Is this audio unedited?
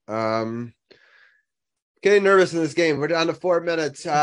yes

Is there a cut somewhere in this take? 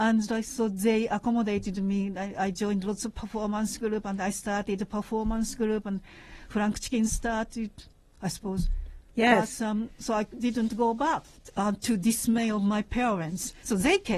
no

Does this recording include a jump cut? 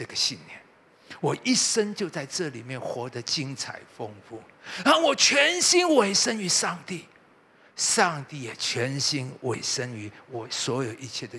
no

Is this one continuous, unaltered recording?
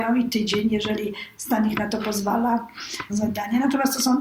no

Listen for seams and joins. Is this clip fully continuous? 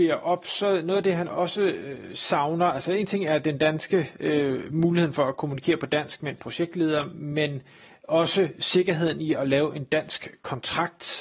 yes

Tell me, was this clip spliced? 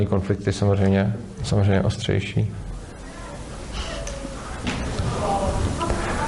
yes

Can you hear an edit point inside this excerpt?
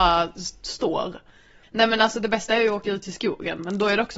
no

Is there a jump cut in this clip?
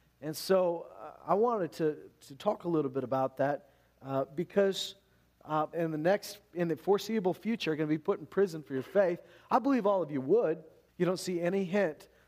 yes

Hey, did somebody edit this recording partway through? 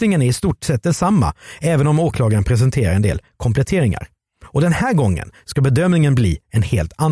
no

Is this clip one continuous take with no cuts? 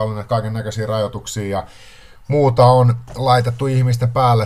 yes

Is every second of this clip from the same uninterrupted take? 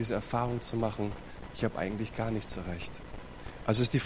no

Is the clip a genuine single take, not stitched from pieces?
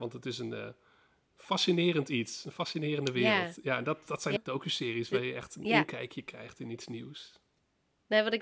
no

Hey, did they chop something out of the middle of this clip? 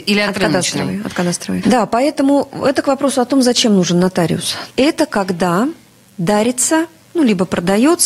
yes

